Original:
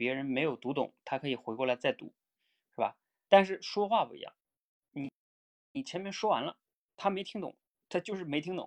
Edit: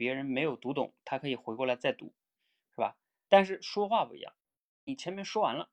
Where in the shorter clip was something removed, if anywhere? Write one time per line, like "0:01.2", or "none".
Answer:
0:04.7